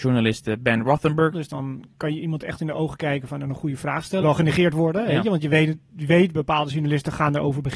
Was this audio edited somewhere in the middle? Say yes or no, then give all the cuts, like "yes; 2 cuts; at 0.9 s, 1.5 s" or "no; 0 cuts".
yes; 2 cuts; at 1.3 s, 4.2 s